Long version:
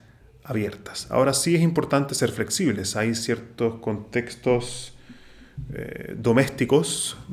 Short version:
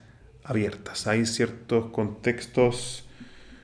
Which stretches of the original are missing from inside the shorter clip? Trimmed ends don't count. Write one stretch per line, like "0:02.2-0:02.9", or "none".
0:01.0-0:02.9